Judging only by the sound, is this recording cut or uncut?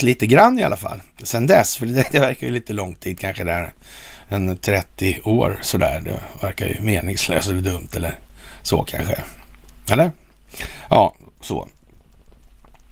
uncut